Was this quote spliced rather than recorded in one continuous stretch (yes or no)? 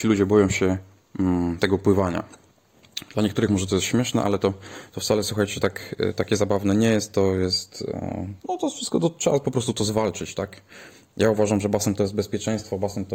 yes